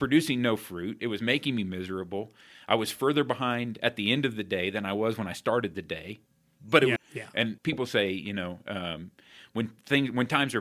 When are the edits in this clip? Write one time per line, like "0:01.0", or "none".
0:07.0